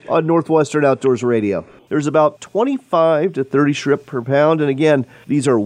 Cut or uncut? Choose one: cut